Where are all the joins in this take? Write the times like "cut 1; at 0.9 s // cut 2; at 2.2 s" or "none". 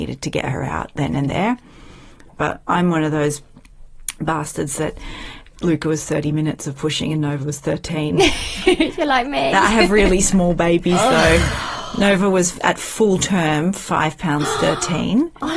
none